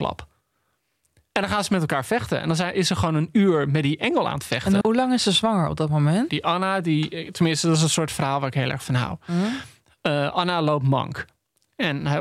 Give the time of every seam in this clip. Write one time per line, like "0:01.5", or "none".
0:04.8
0:06.3